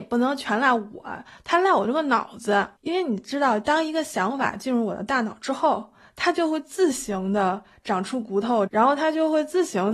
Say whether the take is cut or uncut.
cut